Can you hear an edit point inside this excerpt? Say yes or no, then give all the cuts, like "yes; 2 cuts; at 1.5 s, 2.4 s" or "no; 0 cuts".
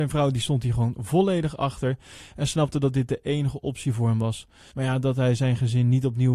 yes; 1 cut; at 4.7 s